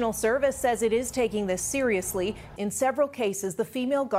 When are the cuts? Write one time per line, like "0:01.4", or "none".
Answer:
0:02.6